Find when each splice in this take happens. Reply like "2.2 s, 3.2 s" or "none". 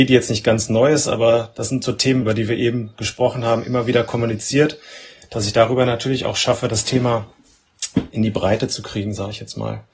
2.2 s